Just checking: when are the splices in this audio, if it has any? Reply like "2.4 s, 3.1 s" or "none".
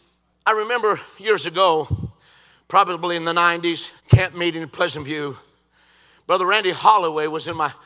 4.0 s